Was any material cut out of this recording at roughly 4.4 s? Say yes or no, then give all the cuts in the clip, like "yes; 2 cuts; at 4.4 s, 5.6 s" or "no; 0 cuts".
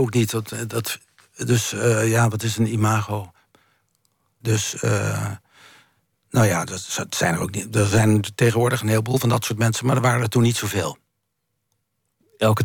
yes; 1 cut; at 4.4 s